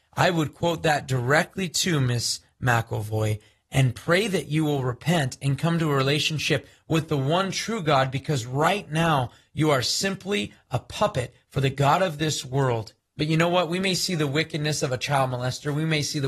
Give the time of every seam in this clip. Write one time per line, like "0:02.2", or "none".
0:13.0